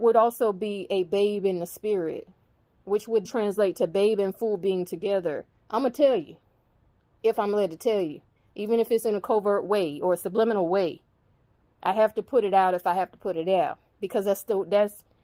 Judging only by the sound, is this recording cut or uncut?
cut